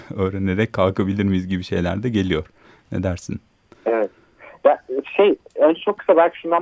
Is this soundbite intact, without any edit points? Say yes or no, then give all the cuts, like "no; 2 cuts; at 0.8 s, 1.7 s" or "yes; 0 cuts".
yes; 0 cuts